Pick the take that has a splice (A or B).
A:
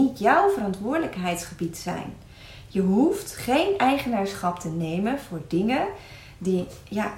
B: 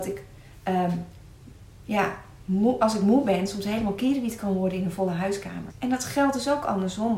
B